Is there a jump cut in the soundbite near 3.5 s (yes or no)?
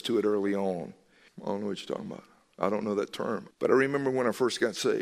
yes